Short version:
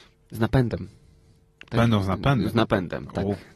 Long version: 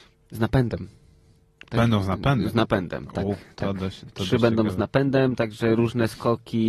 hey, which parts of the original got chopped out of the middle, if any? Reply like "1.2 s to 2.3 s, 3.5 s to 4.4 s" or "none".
none